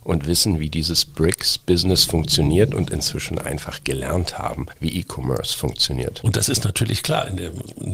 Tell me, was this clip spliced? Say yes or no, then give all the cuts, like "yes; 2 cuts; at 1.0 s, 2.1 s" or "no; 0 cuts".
yes; 1 cut; at 6.2 s